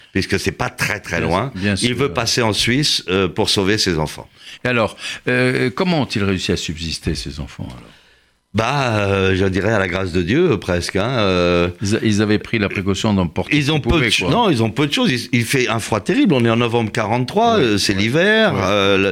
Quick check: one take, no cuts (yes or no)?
yes